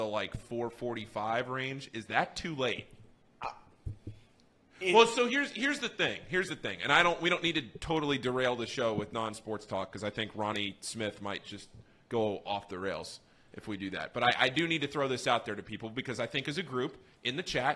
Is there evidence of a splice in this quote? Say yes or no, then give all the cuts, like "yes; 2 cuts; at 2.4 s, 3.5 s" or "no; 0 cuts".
no; 0 cuts